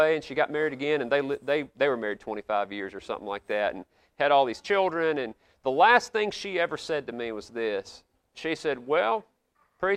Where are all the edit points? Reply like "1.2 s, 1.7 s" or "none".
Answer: none